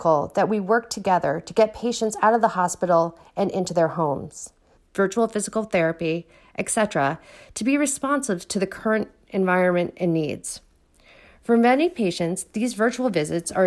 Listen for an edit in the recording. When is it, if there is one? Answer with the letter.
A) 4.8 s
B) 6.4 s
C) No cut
A